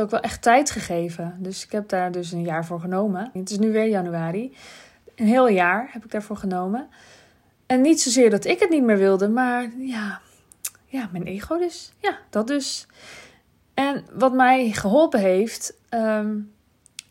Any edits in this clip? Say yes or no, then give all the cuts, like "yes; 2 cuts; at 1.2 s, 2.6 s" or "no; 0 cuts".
yes; 1 cut; at 3.4 s